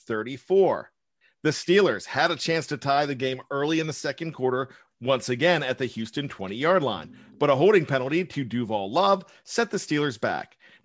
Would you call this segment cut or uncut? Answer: cut